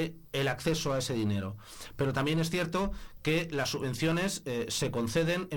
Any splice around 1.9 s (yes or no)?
no